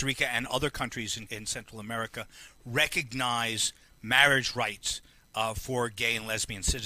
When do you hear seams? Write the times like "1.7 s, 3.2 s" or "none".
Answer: 1.3 s